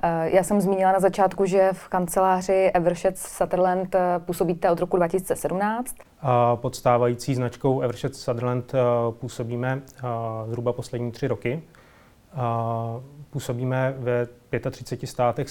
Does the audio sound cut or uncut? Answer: cut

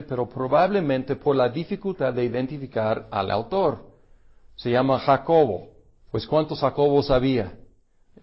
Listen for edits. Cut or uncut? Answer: uncut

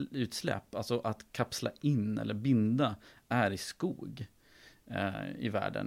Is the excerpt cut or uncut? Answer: uncut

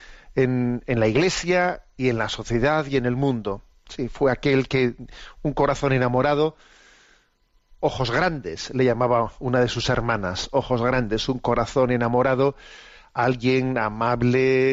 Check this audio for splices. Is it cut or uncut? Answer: uncut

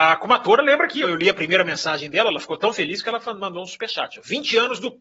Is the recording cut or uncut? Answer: cut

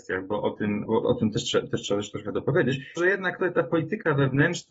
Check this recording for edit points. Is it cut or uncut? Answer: cut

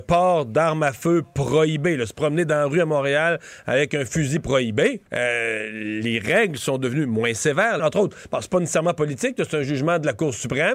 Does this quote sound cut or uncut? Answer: cut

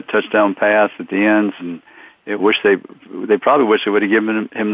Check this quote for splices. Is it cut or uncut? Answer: cut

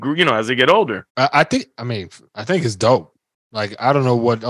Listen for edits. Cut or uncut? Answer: cut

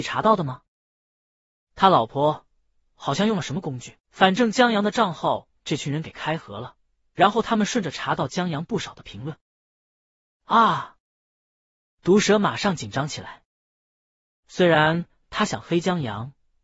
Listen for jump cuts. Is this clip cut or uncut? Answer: uncut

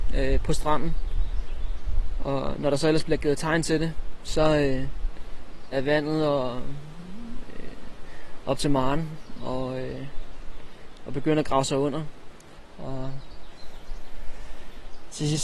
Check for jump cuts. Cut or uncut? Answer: cut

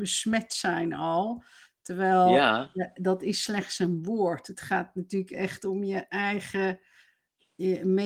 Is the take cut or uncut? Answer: uncut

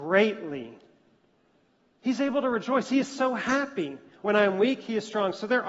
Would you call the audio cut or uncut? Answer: cut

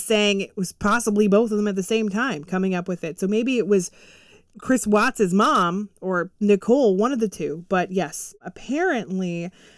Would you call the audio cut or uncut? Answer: uncut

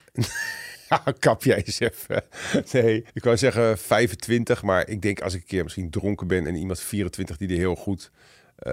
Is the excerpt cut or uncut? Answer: cut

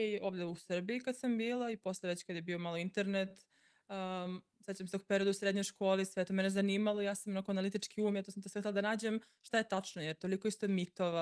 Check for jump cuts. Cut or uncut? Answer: uncut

